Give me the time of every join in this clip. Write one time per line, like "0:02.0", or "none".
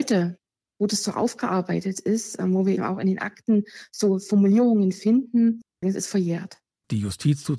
0:02.8
0:05.8